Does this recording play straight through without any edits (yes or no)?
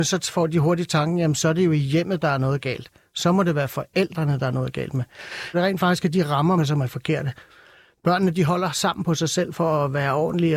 no